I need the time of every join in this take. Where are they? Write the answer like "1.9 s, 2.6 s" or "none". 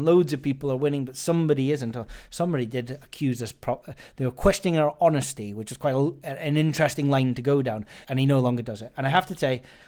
8.0 s